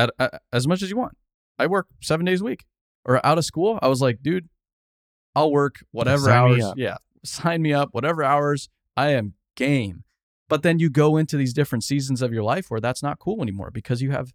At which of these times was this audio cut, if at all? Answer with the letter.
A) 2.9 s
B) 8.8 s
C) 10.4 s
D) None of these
A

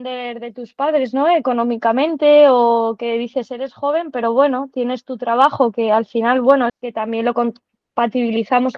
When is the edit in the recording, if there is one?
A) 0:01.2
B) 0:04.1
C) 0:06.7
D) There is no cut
C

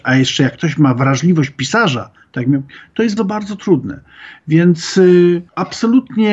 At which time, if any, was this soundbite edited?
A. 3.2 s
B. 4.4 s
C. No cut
A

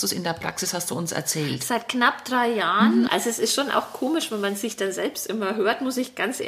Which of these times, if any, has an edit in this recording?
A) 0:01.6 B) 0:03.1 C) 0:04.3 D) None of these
B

